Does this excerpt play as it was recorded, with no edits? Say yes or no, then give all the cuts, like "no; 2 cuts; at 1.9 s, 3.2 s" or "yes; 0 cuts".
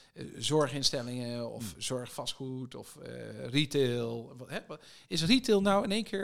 yes; 0 cuts